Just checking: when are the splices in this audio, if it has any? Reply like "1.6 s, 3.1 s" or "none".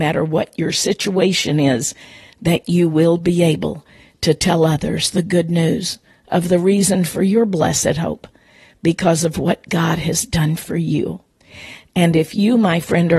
none

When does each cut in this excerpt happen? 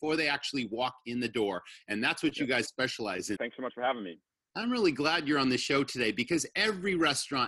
3.4 s

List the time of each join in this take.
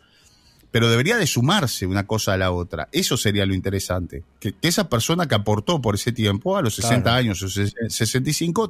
none

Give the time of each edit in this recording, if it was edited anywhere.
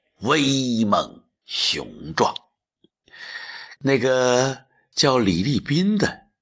3.7 s

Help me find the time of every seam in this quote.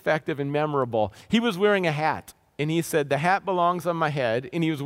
none

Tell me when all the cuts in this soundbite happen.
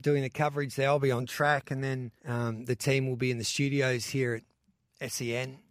2.2 s

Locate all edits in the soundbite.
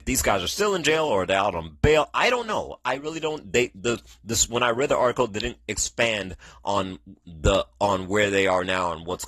none

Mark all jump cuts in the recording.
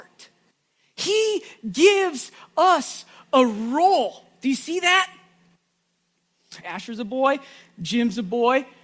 6.6 s

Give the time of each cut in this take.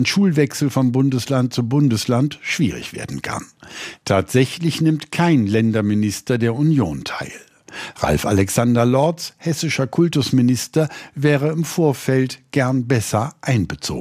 3.9 s

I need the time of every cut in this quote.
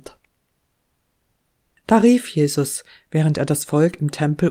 none

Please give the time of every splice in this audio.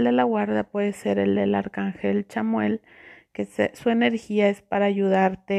none

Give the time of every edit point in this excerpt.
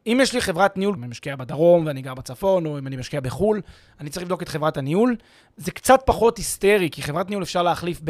1.0 s

